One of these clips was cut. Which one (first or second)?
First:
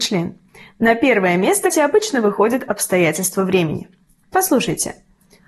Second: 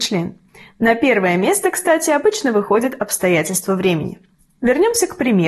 first